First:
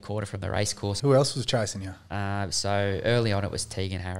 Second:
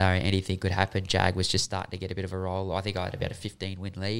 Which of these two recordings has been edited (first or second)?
first